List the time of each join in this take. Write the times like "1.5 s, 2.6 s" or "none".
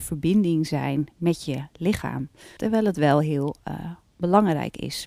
2.6 s